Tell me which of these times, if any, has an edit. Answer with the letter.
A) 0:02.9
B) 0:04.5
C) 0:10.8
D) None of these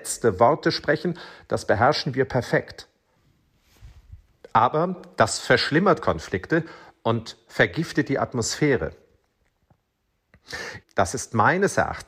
C